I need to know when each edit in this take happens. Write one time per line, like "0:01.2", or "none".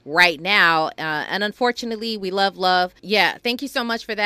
0:03.0